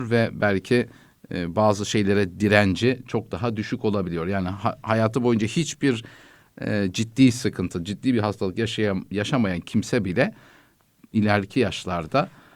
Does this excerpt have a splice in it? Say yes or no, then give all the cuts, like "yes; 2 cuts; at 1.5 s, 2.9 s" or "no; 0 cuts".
no; 0 cuts